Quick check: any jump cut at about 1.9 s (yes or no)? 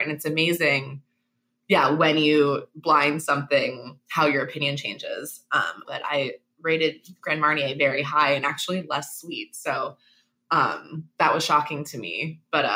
no